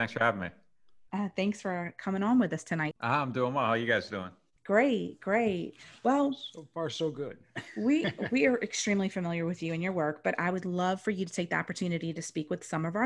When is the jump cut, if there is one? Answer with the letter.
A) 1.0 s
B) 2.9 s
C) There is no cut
B